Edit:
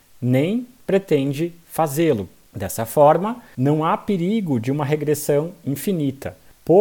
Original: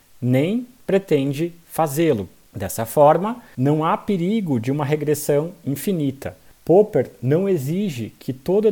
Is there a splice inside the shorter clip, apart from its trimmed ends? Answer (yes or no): no